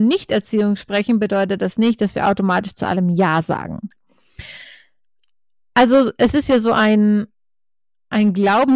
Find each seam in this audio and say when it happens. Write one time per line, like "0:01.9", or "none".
none